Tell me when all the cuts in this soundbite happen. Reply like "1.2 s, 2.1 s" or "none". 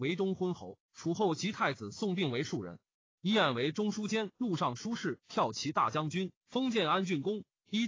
4.3 s, 6.4 s